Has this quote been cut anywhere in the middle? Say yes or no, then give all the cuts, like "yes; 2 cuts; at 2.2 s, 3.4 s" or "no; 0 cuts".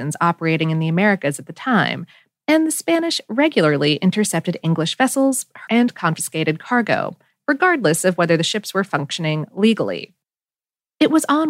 yes; 1 cut; at 5.7 s